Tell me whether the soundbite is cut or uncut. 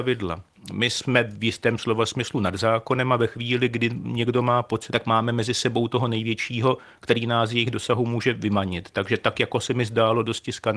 cut